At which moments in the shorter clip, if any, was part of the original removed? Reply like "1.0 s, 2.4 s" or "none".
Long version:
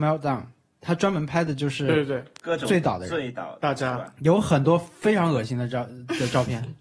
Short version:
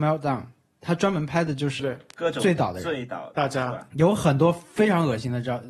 1.8 s

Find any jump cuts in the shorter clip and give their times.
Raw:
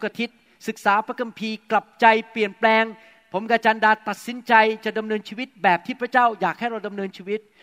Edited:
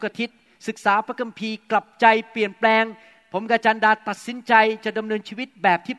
none

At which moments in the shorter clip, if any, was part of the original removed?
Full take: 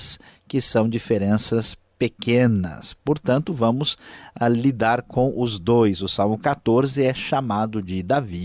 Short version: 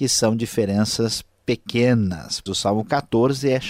2.5 s

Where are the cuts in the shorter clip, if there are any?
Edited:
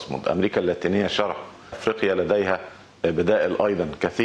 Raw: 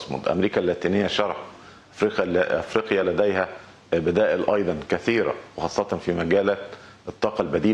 1.7 s

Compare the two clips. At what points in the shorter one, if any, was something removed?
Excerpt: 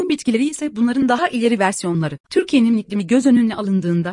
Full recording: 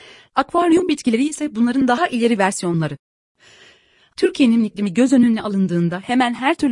2.2 s

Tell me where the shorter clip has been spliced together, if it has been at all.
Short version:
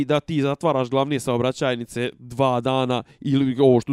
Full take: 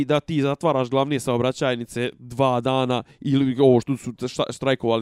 none

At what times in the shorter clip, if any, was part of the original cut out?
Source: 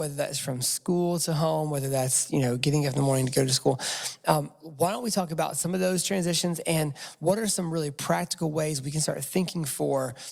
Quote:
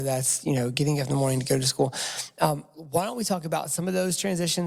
none

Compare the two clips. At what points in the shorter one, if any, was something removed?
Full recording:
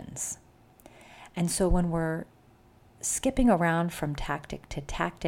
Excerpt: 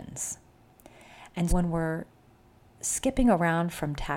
1.5 s

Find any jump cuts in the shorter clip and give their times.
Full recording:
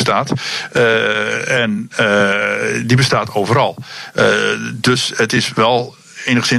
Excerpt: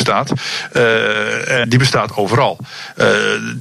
1.6 s

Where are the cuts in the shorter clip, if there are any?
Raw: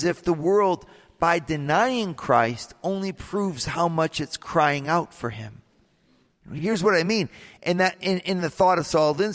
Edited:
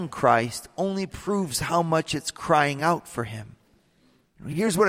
none

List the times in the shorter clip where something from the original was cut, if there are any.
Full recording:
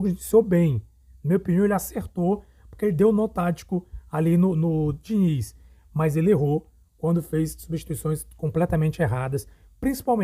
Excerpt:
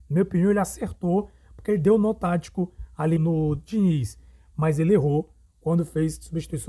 3.2 s

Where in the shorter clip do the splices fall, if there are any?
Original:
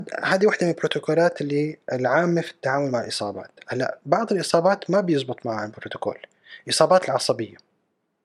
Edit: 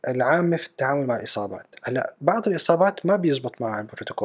none

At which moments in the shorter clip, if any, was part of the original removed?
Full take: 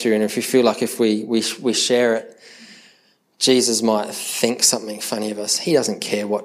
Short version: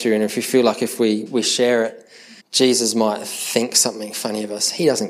1.3 s, 2.4 s

